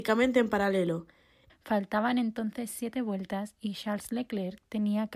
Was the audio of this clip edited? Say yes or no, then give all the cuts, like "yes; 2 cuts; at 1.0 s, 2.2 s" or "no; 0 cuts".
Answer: yes; 1 cut; at 1.5 s